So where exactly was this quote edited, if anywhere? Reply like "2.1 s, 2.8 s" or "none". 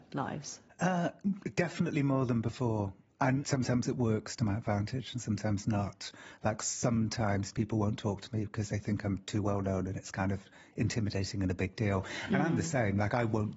none